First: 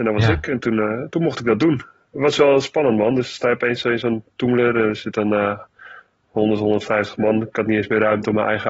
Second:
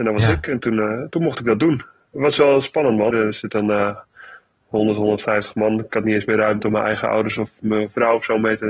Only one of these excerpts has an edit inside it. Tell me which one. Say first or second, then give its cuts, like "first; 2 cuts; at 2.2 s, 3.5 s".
second; 1 cut; at 3.1 s